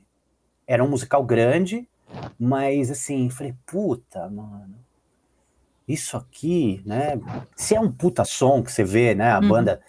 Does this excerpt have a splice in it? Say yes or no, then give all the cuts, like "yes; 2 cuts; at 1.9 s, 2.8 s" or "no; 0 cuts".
yes; 1 cut; at 7.5 s